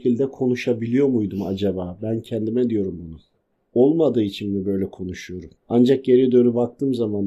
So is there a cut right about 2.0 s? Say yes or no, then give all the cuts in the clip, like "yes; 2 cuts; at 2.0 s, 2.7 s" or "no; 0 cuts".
no; 1 cut; at 5.6 s